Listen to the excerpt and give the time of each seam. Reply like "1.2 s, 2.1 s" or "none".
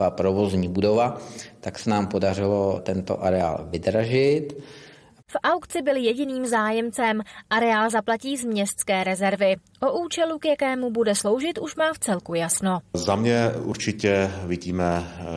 5.2 s